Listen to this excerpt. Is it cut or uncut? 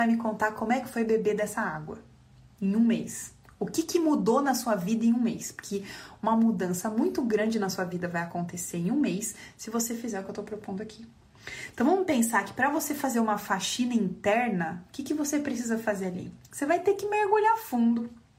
uncut